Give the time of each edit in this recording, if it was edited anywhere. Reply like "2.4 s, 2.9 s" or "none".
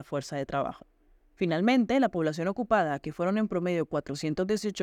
none